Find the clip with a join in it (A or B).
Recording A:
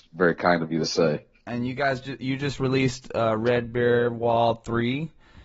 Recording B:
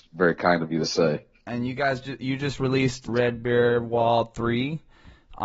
B